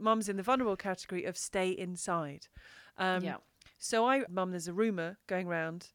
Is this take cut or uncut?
cut